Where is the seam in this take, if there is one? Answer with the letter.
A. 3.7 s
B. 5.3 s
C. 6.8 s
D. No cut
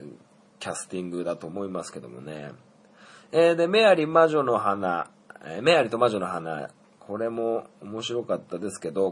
D